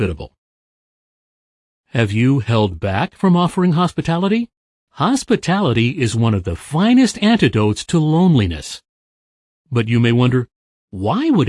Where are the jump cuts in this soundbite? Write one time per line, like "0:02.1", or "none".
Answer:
0:04.9